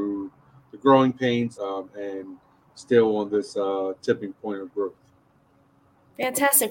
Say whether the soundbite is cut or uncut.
cut